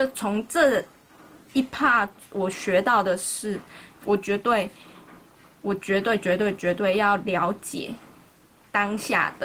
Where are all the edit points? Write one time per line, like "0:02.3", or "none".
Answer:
0:03.9